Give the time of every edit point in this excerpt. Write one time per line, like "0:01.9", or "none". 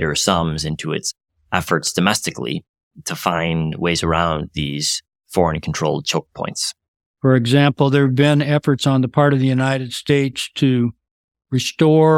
0:07.1